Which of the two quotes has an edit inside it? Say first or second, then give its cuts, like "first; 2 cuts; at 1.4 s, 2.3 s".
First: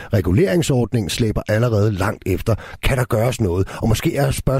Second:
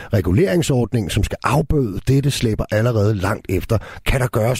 first; 1 cut; at 1.1 s